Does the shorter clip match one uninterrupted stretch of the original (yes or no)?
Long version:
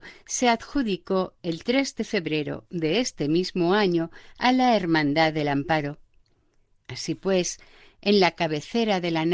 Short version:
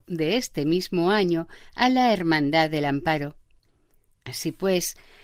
yes